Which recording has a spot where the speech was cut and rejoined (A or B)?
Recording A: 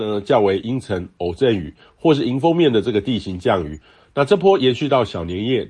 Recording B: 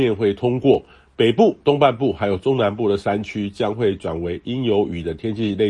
A